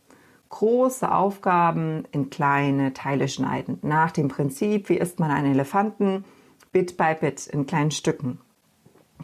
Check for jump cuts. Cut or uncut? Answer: uncut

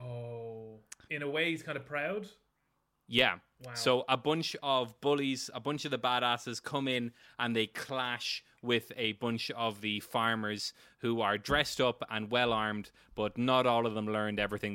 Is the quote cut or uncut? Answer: cut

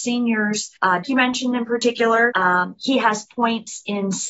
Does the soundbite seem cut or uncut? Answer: cut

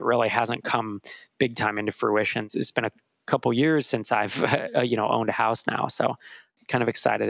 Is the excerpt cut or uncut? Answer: uncut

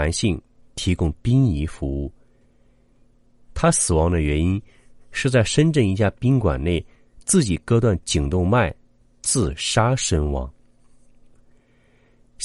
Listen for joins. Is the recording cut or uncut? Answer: cut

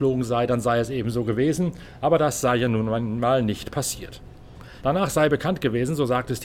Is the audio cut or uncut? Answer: cut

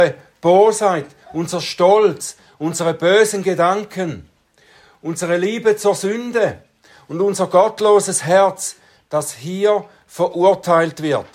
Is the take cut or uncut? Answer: uncut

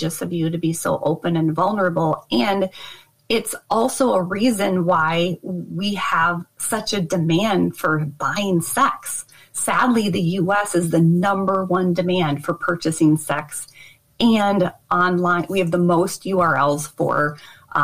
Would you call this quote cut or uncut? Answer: uncut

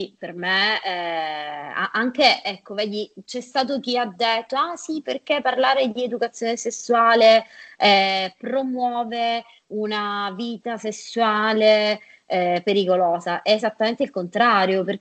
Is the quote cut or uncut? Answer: uncut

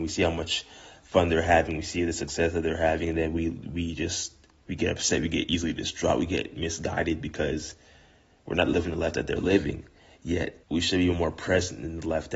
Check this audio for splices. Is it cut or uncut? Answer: cut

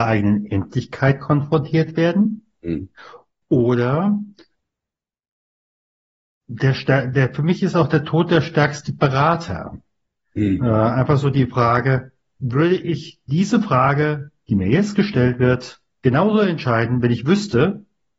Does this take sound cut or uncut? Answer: cut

